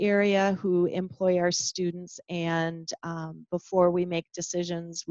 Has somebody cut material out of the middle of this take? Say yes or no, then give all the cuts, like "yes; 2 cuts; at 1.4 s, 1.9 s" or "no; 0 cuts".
no; 0 cuts